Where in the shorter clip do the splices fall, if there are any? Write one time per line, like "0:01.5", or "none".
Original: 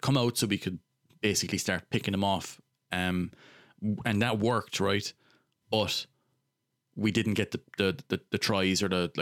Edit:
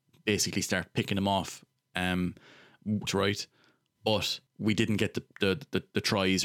0:03.1
0:04.5